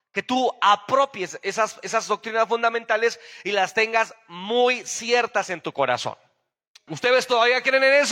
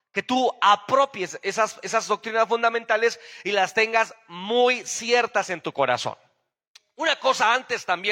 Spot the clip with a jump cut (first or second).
first